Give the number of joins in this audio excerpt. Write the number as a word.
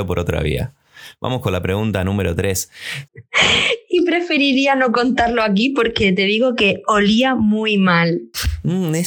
one